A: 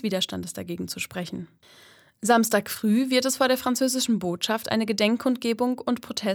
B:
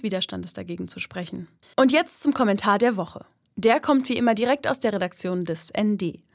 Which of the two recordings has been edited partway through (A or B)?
B